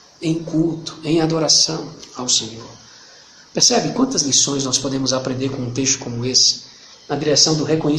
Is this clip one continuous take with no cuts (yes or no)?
no